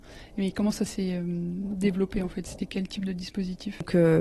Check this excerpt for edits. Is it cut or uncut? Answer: uncut